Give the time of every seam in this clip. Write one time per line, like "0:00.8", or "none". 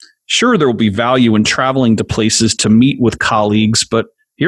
none